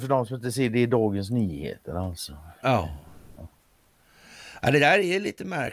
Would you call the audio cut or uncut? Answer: uncut